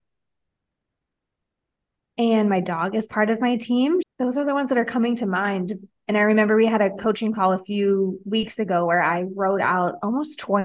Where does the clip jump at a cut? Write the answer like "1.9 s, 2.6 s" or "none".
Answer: 4.0 s